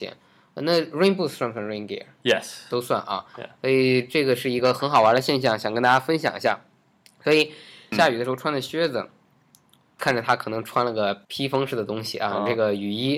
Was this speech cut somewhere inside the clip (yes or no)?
yes